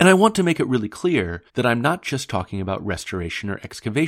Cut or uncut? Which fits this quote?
cut